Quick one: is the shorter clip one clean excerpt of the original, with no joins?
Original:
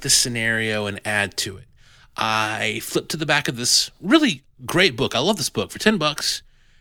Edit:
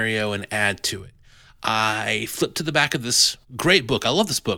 no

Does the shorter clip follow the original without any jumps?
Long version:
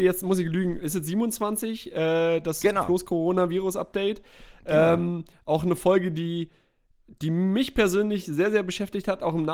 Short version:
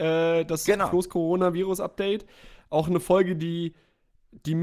no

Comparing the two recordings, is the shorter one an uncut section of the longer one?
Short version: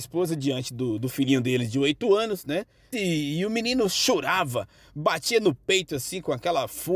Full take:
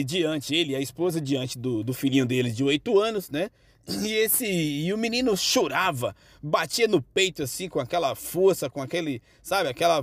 no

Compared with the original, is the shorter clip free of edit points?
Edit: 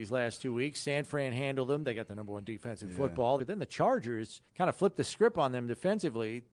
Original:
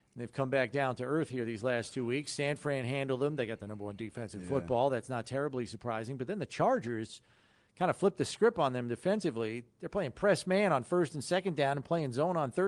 no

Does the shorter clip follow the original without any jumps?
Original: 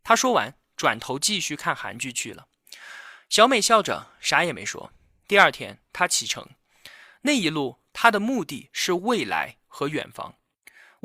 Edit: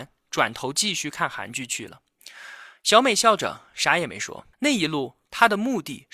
no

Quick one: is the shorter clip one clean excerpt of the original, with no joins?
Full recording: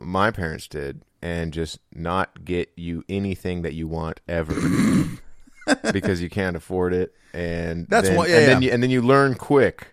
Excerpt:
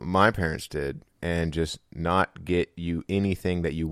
yes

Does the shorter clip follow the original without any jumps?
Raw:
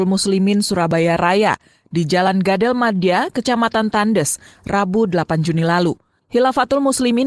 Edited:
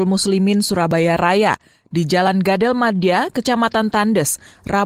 yes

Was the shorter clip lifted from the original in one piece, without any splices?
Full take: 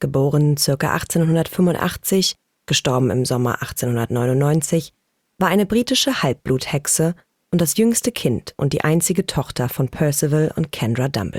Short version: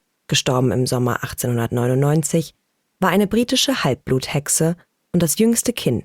yes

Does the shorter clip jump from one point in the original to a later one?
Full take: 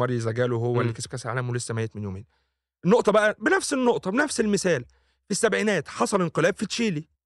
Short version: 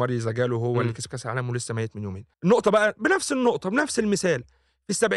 yes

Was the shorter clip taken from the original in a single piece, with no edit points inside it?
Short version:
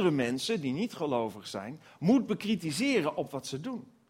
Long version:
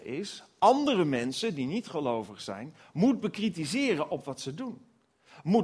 yes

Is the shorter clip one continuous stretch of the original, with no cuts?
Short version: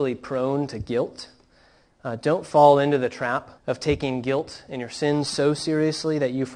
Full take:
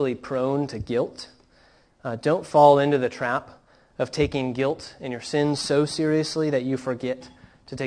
no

